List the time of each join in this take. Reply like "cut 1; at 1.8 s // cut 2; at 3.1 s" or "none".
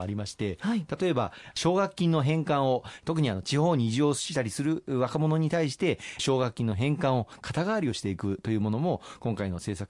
none